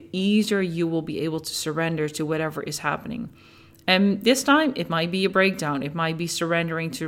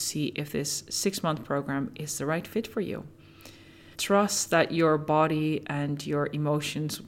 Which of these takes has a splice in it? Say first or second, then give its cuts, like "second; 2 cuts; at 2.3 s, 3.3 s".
second; 1 cut; at 3.9 s